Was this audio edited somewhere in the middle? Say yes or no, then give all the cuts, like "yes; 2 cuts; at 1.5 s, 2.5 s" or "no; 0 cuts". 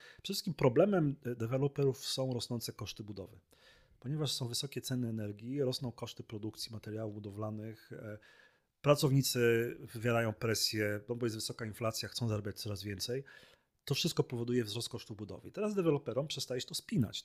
no; 0 cuts